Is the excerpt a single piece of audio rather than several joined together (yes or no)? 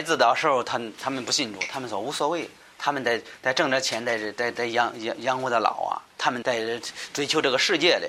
no